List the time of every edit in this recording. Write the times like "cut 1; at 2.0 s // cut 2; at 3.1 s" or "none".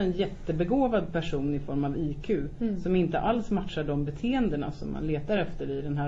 none